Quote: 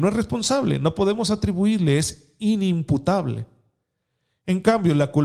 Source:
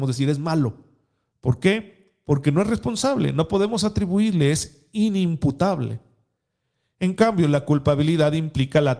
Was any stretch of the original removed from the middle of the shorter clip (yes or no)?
no